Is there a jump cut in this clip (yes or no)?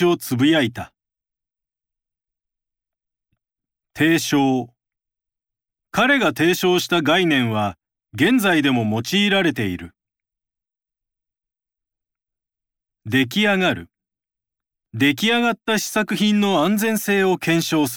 no